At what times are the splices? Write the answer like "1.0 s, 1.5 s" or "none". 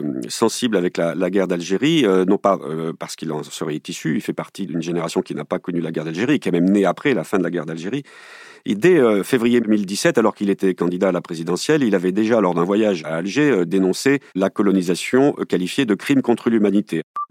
14.3 s